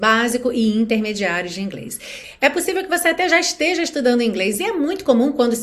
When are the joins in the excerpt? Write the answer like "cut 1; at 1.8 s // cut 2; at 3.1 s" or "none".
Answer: none